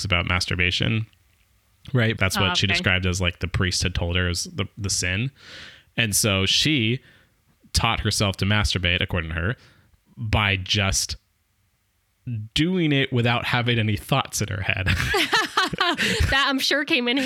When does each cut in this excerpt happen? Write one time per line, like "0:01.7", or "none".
0:02.2